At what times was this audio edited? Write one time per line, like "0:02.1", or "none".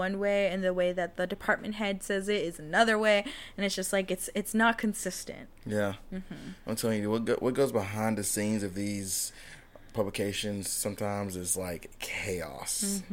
none